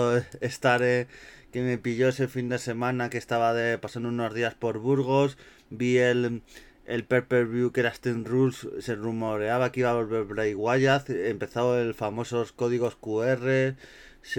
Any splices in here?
no; 0 cuts

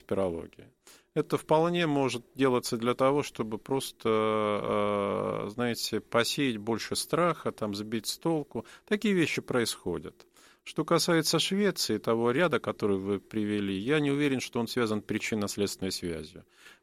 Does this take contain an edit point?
no; 0 cuts

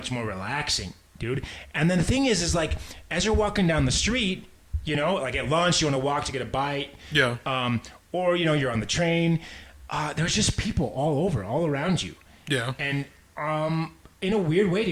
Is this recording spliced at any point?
no; 0 cuts

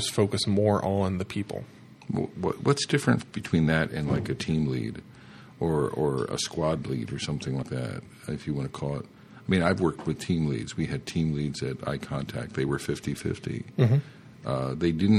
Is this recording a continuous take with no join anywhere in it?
no; 1 cut; at 7.6 s

